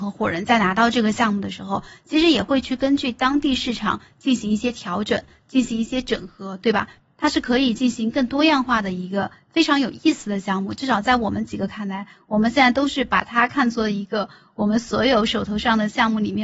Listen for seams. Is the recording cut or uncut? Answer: uncut